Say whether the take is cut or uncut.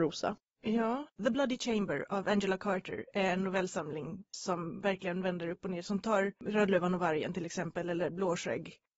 uncut